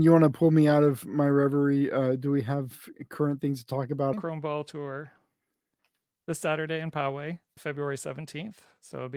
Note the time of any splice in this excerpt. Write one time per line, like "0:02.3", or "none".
0:04.1
0:07.6